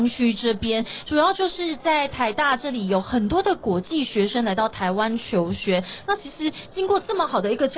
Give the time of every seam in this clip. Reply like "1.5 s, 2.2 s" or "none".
none